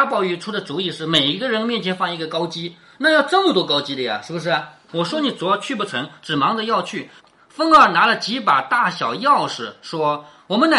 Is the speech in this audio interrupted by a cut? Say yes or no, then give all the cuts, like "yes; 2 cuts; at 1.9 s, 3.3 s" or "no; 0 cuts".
yes; 2 cuts; at 4.9 s, 7.2 s